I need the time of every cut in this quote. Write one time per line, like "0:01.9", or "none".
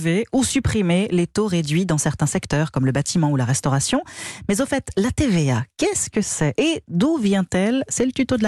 none